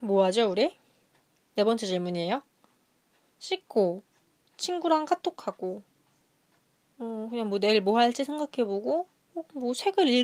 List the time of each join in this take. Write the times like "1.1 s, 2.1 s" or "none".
4.5 s